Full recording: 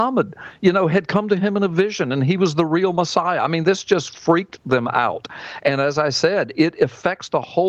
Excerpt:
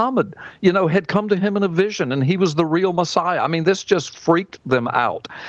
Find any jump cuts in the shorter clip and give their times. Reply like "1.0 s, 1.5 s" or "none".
none